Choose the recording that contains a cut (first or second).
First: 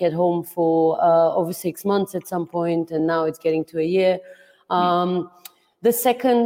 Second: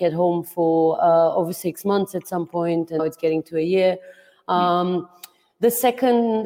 second